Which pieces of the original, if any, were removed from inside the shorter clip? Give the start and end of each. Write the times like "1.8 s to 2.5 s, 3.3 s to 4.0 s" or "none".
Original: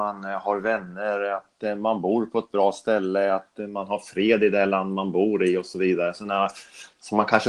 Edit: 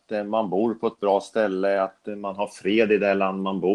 none